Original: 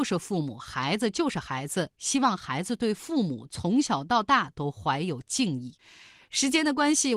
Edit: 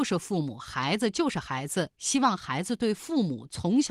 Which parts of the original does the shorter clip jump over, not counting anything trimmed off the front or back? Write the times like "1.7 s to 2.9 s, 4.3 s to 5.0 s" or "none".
none